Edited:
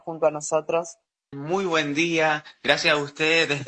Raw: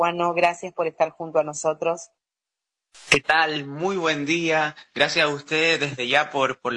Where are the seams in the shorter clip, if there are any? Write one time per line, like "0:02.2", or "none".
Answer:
0:01.3